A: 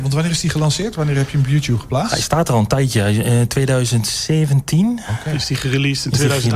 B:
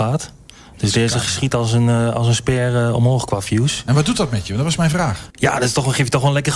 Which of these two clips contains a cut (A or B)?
B